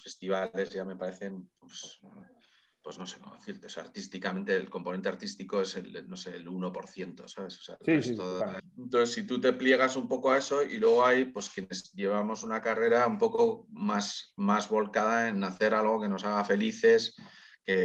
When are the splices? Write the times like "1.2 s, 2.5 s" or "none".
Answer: 8.6 s